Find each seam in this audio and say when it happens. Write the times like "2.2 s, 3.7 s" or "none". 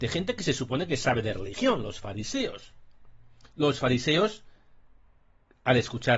none